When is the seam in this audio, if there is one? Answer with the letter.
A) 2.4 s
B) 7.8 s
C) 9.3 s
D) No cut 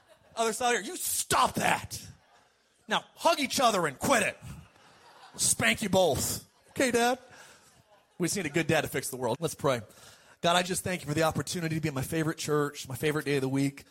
C